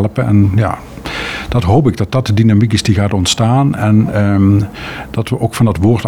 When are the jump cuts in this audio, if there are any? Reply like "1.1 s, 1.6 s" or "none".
none